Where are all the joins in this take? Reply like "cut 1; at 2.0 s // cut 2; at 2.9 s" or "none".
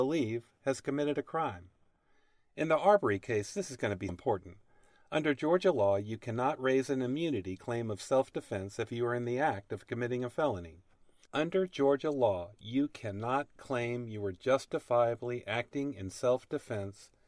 cut 1; at 4.1 s // cut 2; at 11.2 s